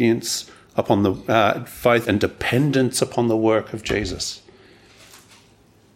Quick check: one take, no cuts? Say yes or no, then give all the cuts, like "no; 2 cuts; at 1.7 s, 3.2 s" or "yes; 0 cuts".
no; 1 cut; at 2.0 s